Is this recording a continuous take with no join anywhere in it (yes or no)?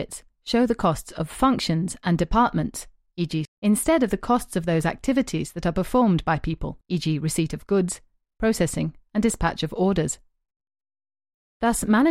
no